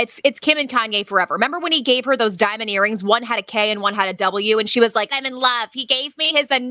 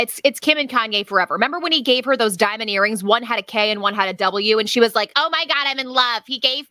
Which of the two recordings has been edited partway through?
first; 1 cut; at 5.1 s

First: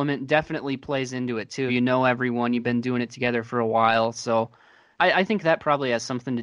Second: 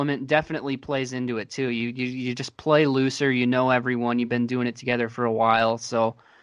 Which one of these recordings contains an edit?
first; 2 cuts; at 1.7 s, 4.9 s

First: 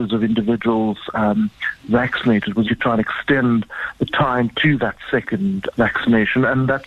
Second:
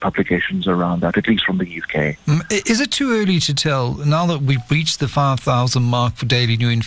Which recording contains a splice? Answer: first; 2 cuts; at 2.6 s, 5.7 s

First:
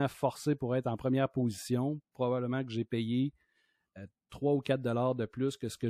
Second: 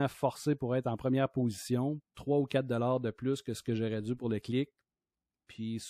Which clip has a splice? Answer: second; 1 cut; at 2.0 s

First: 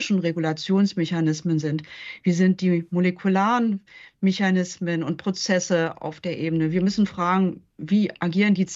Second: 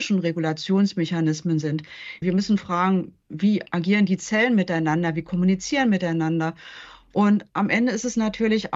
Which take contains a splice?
second; 1 cut; at 2.2 s

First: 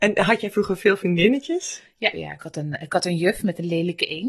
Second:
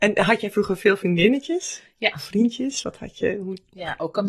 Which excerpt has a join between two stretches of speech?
first; 1 cut; at 2.1 s

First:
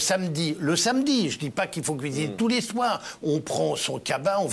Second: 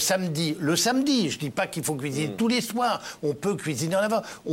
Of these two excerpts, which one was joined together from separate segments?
first; 1 cut; at 3.2 s

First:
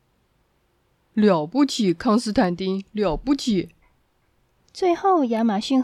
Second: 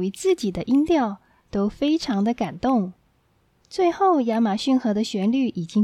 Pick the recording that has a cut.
first; 1 cut; at 4.6 s

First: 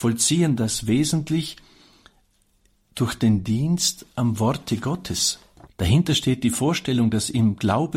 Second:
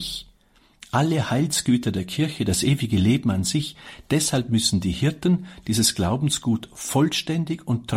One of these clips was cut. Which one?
first; 1 cut; at 5.7 s

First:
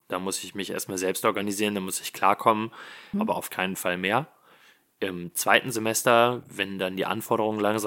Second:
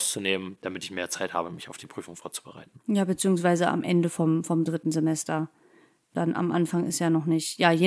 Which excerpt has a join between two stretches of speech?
first; 1 cut; at 3.1 s

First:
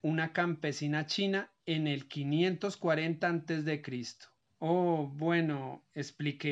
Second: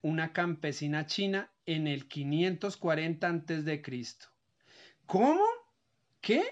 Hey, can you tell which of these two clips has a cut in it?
first; 1 cut; at 4.5 s

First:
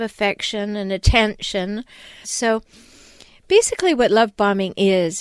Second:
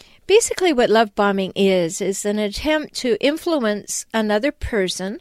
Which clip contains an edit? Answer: first; 1 cut; at 2.2 s

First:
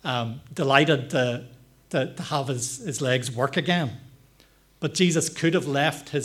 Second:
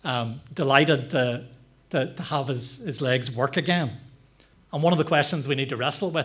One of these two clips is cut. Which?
second; 1 cut; at 4.5 s

